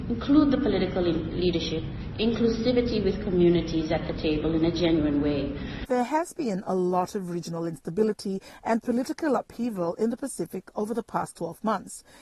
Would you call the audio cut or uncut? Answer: uncut